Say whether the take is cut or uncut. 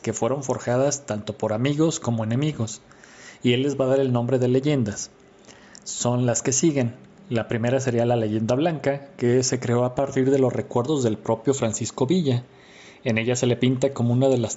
uncut